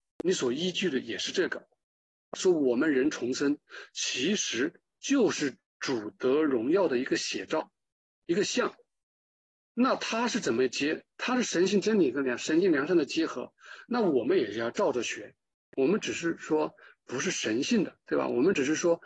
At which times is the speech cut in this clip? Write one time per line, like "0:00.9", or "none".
0:02.3